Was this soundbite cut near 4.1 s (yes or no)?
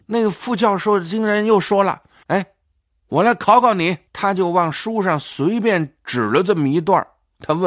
yes